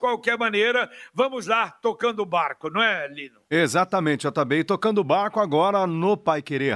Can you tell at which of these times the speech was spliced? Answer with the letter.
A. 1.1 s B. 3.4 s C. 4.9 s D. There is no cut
D